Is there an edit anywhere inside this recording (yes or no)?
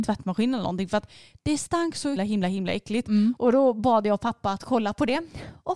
yes